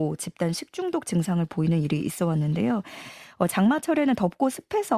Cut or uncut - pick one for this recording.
uncut